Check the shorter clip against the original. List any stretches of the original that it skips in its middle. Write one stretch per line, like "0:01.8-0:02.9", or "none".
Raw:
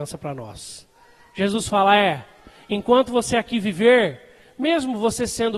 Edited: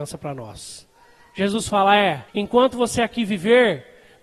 0:02.3-0:02.6

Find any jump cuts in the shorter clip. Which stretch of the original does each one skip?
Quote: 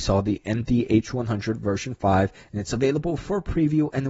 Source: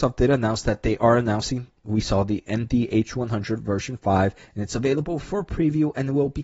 none

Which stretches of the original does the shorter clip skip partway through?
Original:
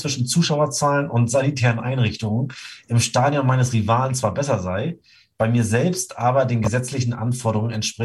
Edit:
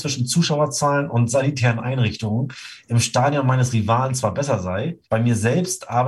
0:05.0-0:05.3

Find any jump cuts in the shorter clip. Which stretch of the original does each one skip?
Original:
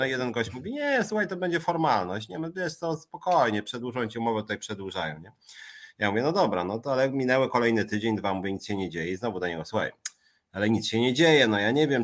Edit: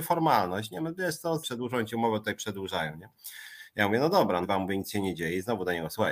0:03.0-0:03.6
0:06.6-0:08.2

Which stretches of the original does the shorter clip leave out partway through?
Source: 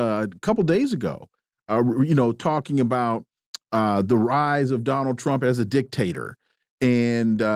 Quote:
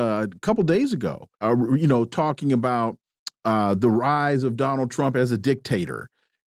0:01.3-0:01.6

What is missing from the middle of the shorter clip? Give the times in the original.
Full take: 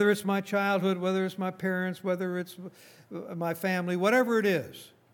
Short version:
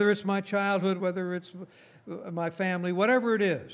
0:01.0-0:02.0

